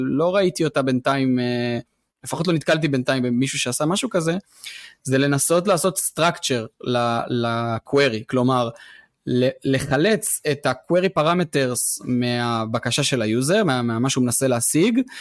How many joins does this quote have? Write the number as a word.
zero